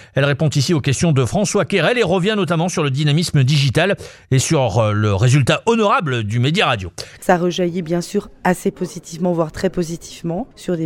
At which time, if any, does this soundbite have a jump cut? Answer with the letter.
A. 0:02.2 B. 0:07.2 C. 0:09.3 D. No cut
B